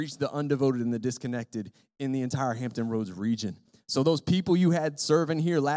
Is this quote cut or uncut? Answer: uncut